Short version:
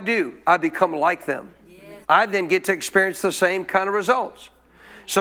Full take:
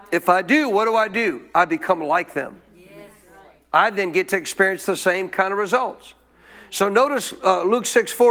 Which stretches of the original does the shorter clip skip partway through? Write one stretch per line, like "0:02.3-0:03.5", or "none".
0:03.1-0:03.7